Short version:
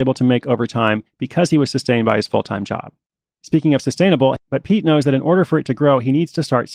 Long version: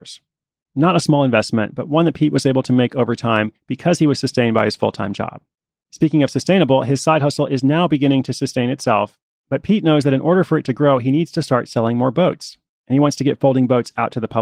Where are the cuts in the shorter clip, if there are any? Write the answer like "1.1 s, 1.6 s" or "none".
4.4 s

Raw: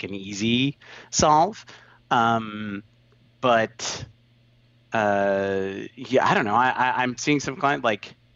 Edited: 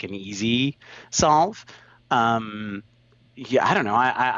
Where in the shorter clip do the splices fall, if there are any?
3.3 s

